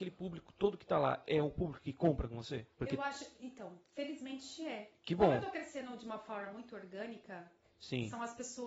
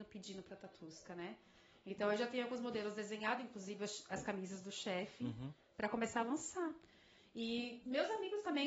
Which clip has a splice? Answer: first; 1 cut; at 2.7 s

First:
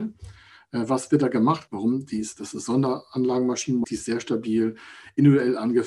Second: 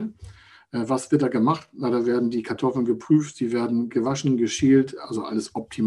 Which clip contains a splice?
first; 2 cuts; at 1.7 s, 3.8 s

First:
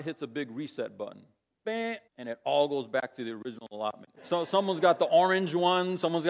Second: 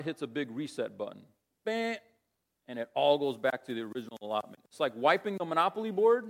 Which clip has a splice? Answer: first; 2 cuts; at 2.1 s, 4.2 s

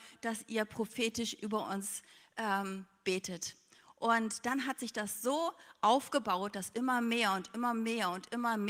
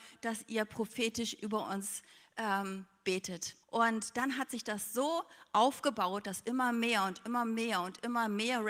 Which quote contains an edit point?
second; 1 cut; at 3.6 s

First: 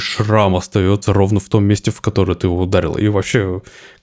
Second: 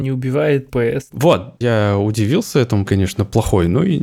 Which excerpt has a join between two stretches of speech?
second; 2 cuts; at 1.1 s, 2.9 s

